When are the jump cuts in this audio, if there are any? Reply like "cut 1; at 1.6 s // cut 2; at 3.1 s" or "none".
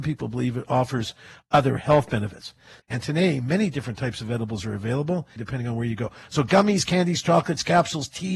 cut 1; at 2.8 s // cut 2; at 5.4 s